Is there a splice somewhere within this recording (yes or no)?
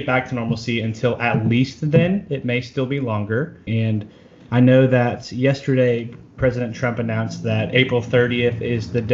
yes